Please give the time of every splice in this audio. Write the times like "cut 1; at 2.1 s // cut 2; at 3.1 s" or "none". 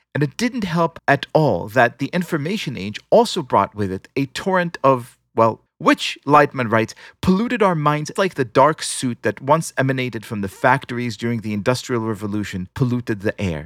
cut 1; at 5.7 s // cut 2; at 8.2 s